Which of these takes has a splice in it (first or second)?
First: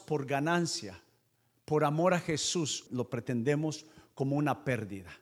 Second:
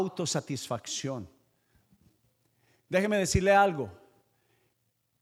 first